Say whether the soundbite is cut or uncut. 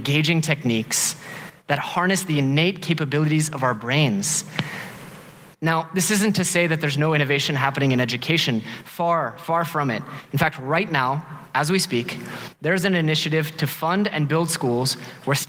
cut